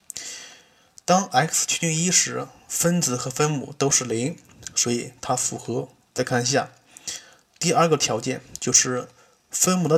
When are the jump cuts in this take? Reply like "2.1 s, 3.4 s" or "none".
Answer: none